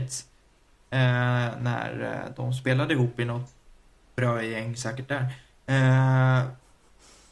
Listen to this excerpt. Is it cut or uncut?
uncut